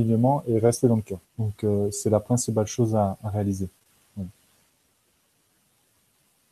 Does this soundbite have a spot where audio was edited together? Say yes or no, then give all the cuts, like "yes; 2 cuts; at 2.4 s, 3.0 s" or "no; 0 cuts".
yes; 1 cut; at 1.2 s